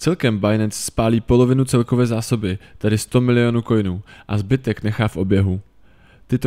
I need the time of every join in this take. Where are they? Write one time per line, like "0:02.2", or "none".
none